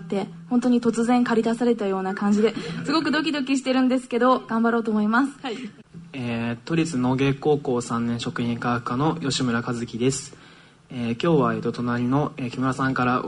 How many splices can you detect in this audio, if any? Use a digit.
1